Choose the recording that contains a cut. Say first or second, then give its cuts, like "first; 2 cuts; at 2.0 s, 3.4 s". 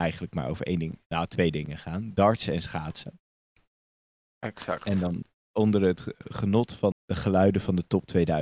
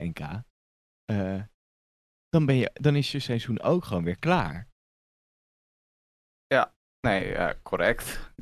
first; 1 cut; at 6.9 s